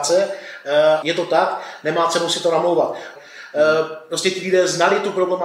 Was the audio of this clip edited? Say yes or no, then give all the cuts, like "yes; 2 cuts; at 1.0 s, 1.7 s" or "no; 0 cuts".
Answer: yes; 2 cuts; at 1.0 s, 3.2 s